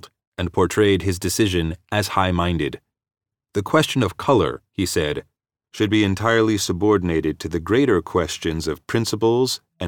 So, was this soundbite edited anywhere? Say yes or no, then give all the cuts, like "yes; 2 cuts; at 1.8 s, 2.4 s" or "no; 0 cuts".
no; 0 cuts